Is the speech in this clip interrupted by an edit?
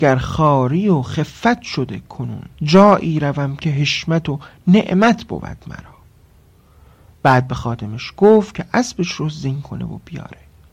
yes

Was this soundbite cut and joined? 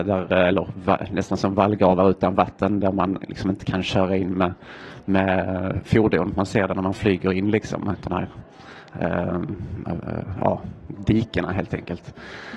no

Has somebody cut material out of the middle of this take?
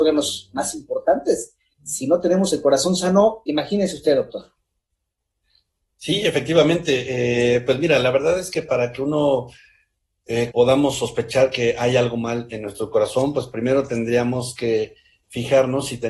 yes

